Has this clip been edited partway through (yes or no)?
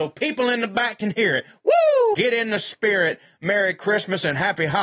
yes